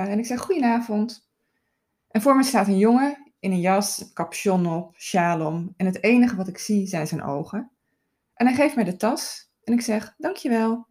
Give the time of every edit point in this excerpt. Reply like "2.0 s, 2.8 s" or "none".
none